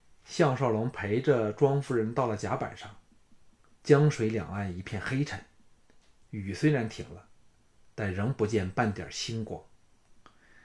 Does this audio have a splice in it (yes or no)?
yes